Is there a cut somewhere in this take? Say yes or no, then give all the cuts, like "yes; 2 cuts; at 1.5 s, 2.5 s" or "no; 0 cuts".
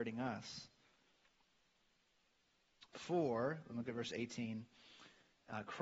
no; 0 cuts